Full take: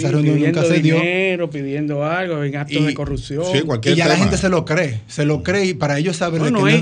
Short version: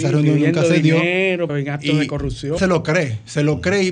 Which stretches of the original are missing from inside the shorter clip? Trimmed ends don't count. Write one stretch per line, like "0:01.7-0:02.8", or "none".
0:01.5-0:02.4
0:03.4-0:04.4